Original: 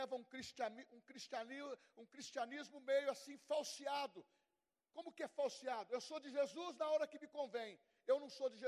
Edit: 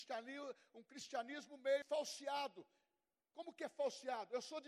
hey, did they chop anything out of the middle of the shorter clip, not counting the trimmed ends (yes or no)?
yes